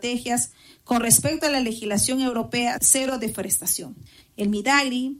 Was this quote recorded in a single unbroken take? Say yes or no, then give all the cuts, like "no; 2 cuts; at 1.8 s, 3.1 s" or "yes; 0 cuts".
no; 1 cut; at 4.2 s